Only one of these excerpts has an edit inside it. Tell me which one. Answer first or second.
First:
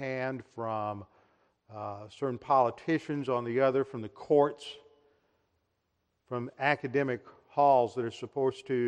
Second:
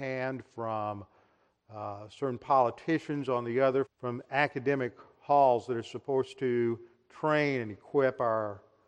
second